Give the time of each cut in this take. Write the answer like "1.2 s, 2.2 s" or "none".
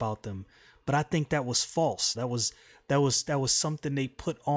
2.1 s